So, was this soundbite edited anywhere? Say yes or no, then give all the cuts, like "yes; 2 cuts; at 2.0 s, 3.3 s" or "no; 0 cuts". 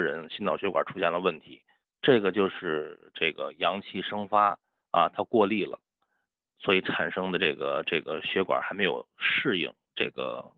no; 0 cuts